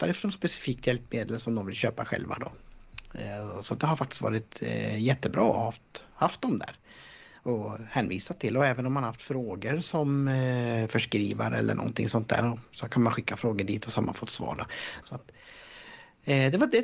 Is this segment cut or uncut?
cut